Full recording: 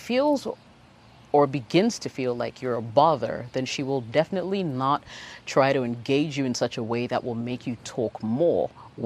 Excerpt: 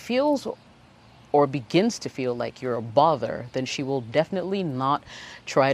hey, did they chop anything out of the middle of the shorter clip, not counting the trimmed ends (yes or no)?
no